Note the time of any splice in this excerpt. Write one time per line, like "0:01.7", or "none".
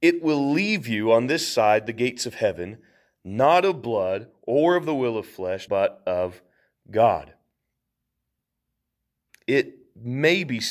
0:05.7